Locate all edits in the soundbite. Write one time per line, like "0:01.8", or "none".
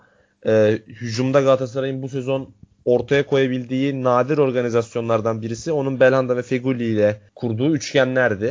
0:07.3